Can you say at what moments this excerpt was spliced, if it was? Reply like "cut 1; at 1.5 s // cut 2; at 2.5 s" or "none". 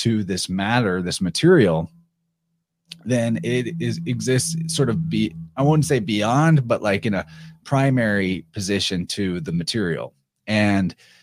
none